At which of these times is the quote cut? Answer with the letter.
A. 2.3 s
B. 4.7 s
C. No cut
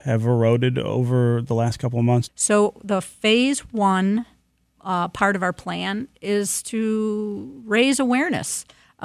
A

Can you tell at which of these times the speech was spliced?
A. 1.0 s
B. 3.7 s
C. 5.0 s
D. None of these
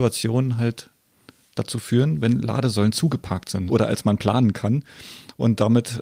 B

